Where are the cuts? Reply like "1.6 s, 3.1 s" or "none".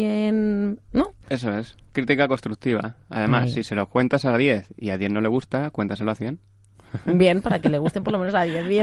none